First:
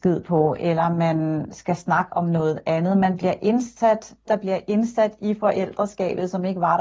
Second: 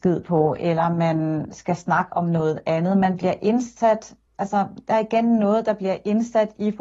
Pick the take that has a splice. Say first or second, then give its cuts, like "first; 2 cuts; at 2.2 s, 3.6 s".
first; 1 cut; at 4.3 s